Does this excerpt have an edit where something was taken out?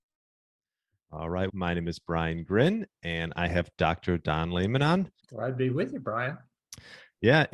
yes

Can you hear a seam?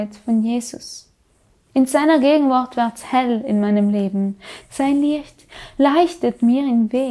yes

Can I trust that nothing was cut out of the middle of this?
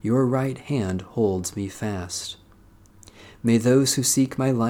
yes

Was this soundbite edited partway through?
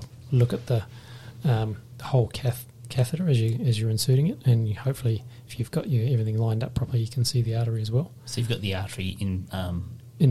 no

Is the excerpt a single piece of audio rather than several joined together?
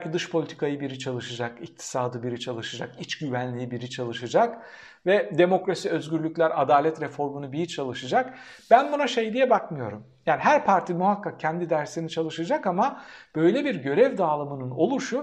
yes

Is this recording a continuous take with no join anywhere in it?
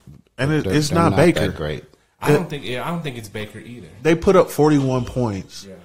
yes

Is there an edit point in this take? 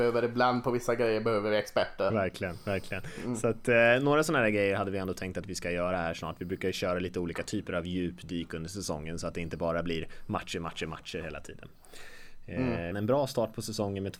yes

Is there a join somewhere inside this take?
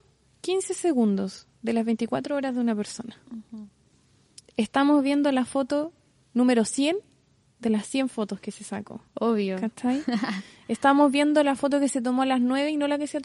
no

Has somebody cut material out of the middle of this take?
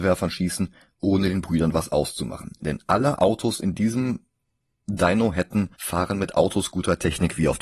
yes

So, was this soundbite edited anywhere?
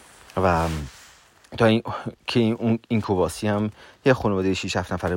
no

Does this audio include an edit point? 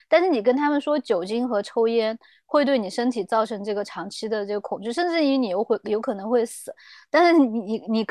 no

